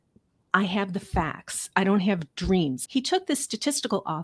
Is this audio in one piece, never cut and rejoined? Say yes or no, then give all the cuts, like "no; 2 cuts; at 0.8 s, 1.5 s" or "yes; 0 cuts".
no; 1 cut; at 2.9 s